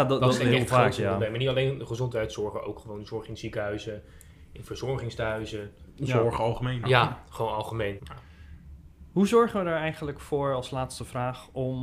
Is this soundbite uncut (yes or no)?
no